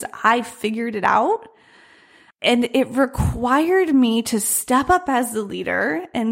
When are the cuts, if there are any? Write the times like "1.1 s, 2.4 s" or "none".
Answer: 2.3 s